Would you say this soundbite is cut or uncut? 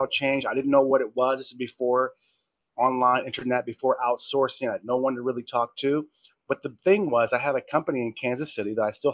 uncut